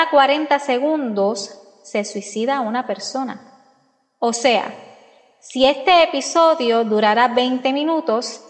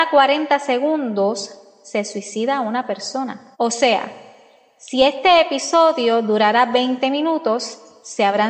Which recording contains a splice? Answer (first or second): second